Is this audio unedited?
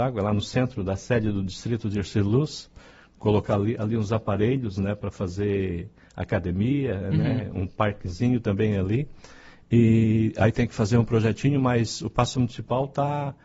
yes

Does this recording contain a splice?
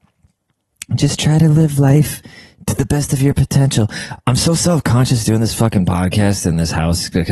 no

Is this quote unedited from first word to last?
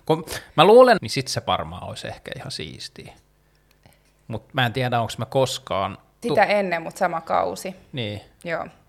no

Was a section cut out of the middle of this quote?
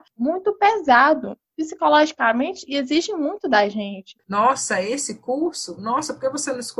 yes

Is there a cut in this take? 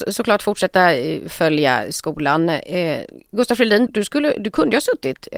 yes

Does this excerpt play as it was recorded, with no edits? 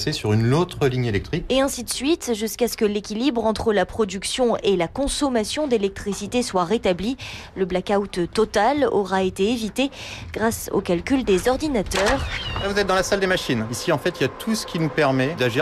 yes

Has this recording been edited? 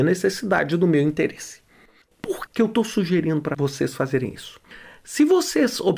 yes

